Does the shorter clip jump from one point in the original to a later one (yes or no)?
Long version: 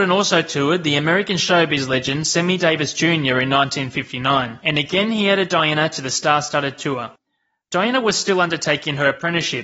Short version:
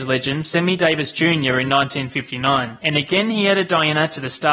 no